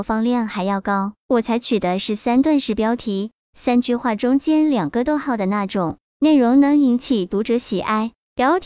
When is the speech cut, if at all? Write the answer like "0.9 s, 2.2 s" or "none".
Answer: 1.2 s